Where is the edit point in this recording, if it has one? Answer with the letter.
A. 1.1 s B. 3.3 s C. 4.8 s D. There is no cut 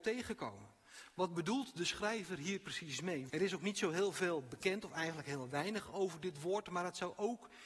B